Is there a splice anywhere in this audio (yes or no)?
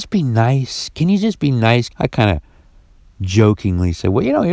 yes